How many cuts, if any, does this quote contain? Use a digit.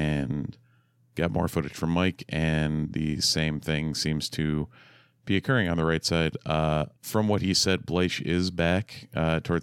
1